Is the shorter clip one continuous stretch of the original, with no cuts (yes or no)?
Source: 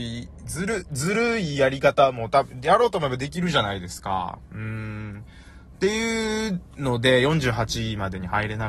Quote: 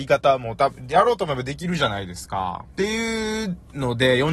no